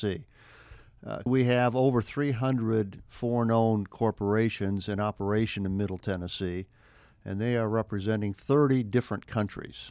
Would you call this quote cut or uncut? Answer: cut